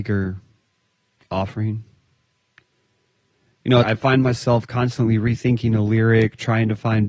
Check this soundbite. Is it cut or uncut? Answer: cut